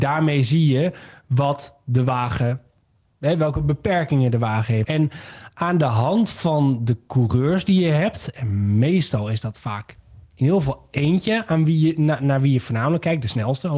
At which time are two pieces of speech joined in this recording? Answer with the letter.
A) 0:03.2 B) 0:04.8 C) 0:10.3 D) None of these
B